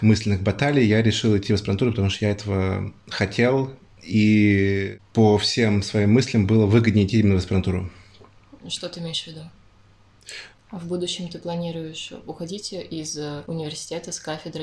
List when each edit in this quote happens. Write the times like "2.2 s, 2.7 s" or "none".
10.5 s